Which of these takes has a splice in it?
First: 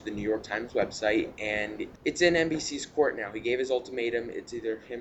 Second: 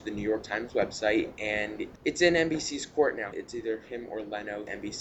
second; 1 cut; at 3.3 s

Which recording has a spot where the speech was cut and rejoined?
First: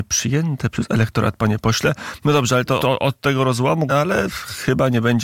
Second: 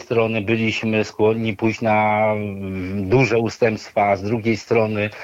first; 2 cuts; at 2.8 s, 3.9 s

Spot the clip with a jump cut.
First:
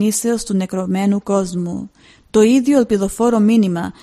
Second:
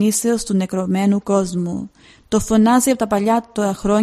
first; 1 cut; at 2.3 s

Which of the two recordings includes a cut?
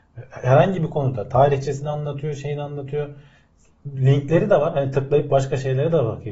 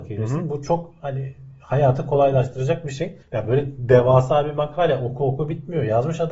second; 1 cut; at 3.2 s

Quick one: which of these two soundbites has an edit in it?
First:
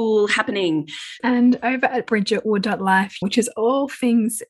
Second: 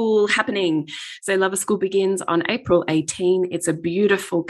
first; 2 cuts; at 1.2 s, 3.2 s

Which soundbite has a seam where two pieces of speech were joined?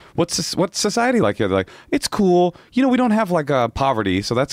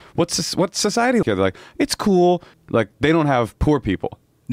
second; 2 cuts; at 1.2 s, 2.5 s

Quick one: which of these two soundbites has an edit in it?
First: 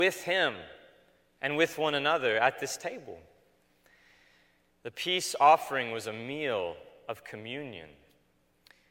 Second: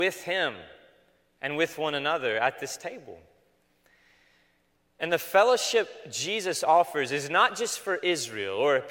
first; 1 cut; at 4.7 s

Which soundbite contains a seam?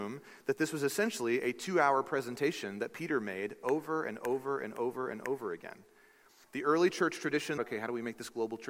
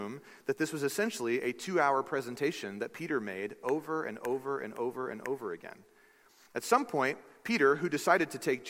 first; 2 cuts; at 6.4 s, 7.6 s

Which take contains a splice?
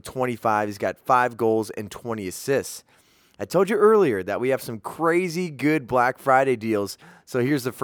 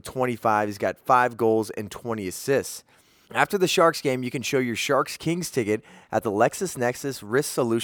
second; 1 cut; at 3.2 s

